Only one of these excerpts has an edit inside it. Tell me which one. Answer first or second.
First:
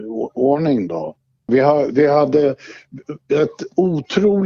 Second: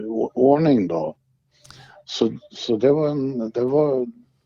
first